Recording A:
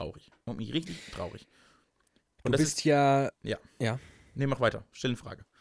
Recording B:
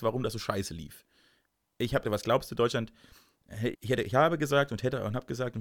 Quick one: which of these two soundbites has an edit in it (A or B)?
B